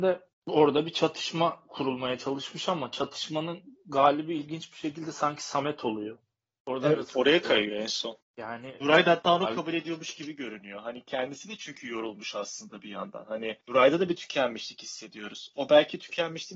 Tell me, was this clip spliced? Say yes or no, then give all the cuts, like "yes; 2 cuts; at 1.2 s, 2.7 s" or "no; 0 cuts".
no; 0 cuts